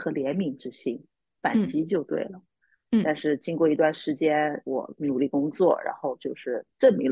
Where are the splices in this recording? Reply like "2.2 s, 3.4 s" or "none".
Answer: 2.8 s